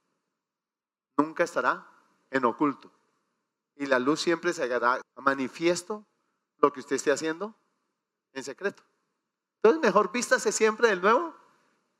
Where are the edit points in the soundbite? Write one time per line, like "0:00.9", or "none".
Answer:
0:05.0